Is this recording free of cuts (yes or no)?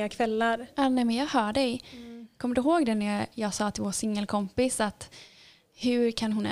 yes